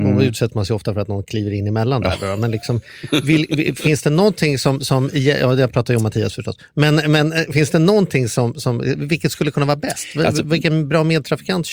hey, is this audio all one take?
yes; 0 cuts

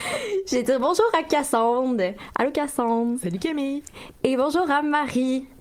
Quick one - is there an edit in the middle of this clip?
no; 0 cuts

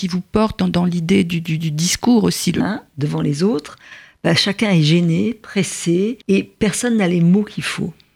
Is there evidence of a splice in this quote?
yes; 2 cuts; at 2.6 s, 6.2 s

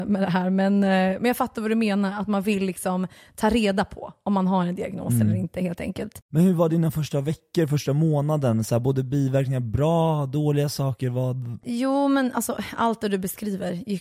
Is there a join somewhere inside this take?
no; 0 cuts

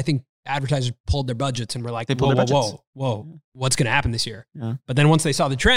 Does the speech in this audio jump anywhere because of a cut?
no; 0 cuts

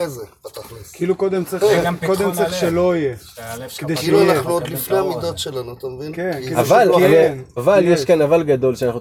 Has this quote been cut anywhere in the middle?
yes; 1 cut; at 7.6 s

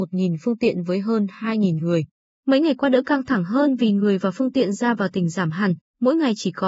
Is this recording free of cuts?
yes; 0 cuts

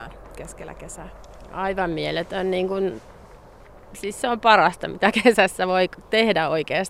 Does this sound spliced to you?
no; 0 cuts

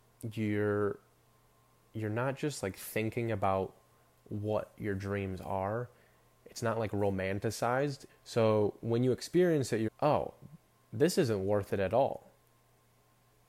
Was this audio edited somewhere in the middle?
yes; 2 cuts; at 8.1 s, 9.9 s

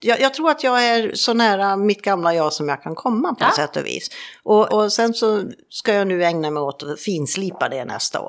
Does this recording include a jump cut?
yes; 1 cut; at 4.7 s

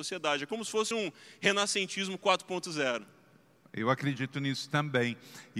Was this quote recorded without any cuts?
yes; 0 cuts

